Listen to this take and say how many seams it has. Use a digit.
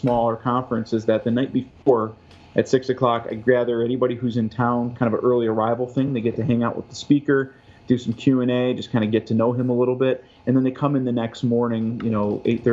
0